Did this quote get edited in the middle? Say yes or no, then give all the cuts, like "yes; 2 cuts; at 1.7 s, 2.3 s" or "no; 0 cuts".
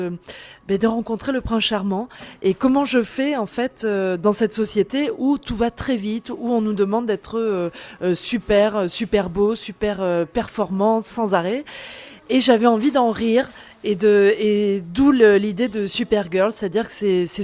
no; 0 cuts